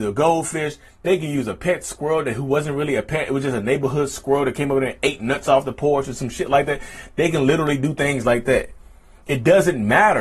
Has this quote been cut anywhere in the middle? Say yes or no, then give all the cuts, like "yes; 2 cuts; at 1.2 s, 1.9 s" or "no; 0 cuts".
no; 0 cuts